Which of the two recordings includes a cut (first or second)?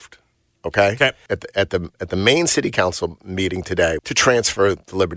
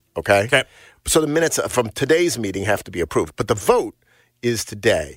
first